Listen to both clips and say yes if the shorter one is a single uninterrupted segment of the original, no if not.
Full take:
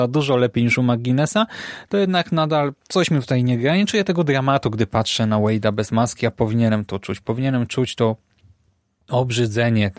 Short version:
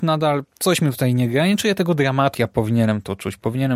no